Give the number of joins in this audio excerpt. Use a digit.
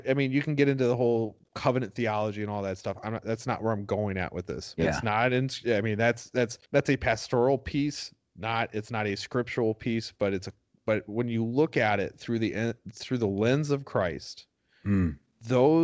2